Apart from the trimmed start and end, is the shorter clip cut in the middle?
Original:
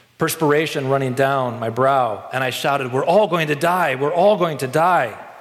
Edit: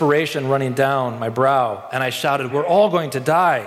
yes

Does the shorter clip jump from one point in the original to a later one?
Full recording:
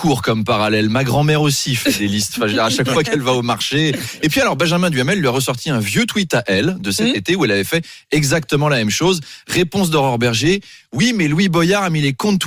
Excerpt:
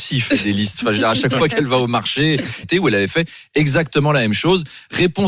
yes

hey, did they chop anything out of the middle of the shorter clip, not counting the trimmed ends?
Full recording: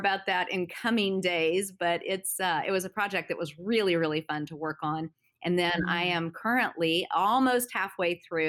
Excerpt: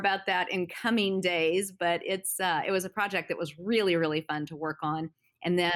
no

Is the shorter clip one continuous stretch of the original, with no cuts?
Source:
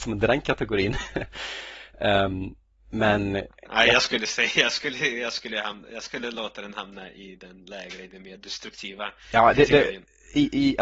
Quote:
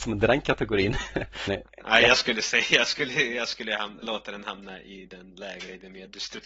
no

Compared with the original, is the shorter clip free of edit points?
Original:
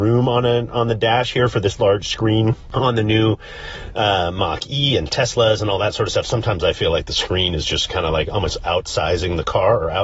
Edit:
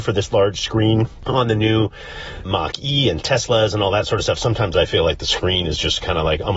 no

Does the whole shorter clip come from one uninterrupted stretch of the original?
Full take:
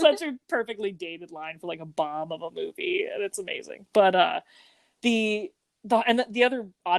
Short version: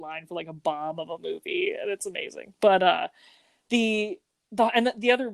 yes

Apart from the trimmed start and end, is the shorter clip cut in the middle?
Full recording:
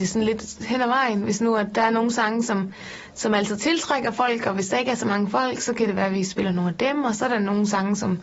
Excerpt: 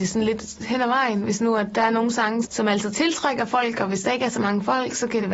yes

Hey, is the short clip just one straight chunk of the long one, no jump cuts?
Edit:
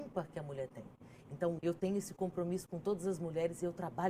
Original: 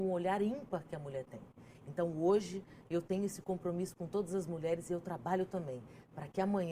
no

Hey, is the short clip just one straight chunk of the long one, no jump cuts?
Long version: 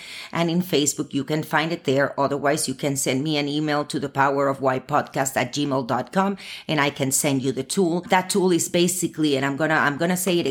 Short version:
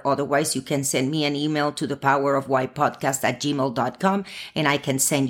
yes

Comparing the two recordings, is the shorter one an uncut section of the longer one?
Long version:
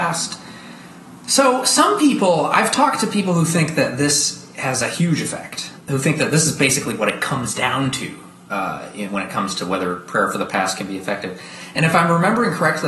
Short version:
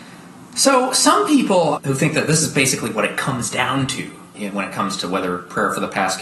no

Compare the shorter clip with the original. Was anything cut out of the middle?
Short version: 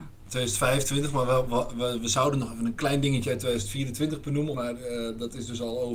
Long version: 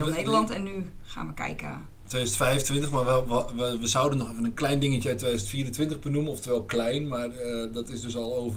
yes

